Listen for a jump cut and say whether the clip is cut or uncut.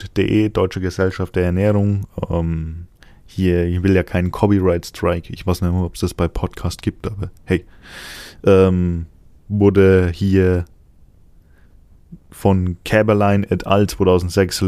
uncut